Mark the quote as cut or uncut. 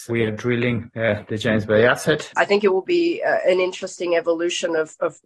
cut